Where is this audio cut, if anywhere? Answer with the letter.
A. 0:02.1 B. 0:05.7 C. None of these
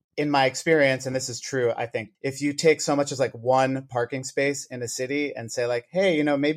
A